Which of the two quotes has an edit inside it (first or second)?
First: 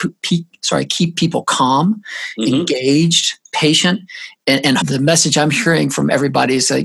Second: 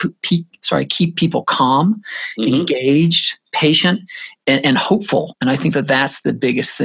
first